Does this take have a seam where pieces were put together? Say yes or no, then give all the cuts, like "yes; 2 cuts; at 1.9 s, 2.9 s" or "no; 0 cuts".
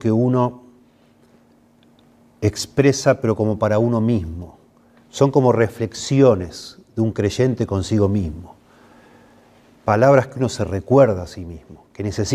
no; 0 cuts